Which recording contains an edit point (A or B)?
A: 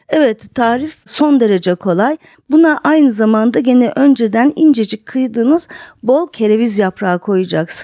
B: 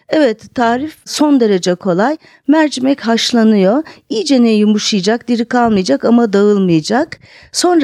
A